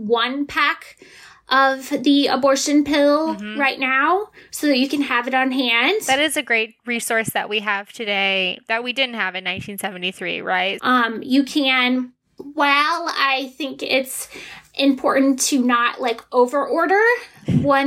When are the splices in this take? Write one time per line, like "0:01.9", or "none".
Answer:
0:10.8